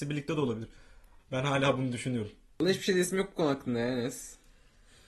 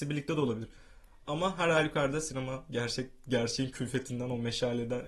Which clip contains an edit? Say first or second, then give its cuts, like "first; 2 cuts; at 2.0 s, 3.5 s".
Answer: first; 2 cuts; at 1.2 s, 2.5 s